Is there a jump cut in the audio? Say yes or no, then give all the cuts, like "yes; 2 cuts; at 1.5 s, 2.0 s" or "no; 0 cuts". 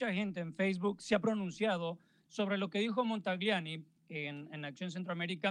no; 0 cuts